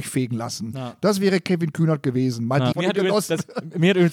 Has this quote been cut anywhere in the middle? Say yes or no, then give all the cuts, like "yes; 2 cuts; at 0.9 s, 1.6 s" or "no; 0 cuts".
yes; 1 cut; at 2.7 s